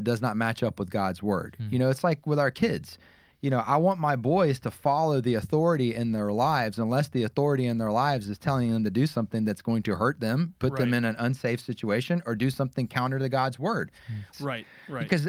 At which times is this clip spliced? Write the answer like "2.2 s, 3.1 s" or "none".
14.3 s